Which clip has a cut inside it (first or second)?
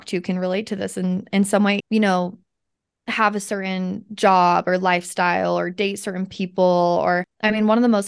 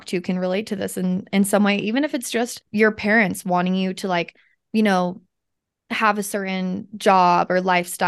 first